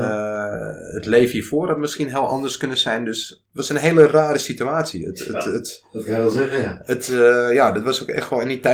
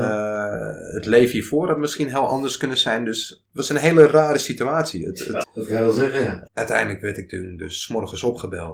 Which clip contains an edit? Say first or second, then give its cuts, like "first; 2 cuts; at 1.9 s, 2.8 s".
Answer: second; 2 cuts; at 5.4 s, 6.5 s